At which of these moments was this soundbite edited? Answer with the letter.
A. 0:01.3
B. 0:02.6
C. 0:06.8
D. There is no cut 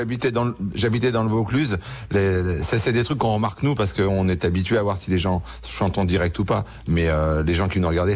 D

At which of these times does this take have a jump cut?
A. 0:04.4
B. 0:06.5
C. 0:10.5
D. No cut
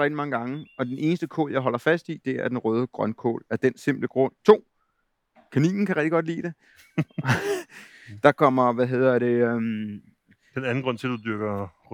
A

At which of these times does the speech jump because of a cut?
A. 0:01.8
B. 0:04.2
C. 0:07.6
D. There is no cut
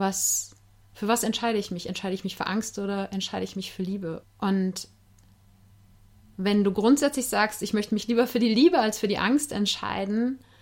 B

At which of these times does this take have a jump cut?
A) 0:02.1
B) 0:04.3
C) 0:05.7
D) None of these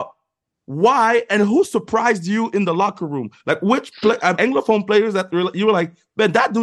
B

